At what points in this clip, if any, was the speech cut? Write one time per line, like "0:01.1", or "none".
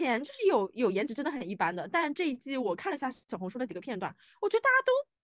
none

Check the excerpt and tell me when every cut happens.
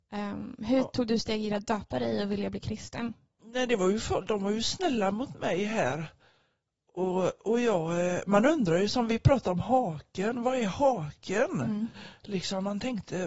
none

